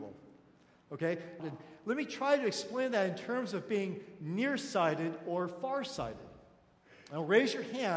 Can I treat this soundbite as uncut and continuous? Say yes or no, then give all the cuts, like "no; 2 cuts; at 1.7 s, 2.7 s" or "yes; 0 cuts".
no; 1 cut; at 1.4 s